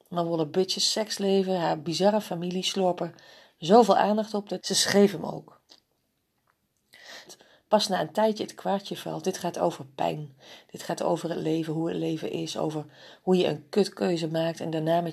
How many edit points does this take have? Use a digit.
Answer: 2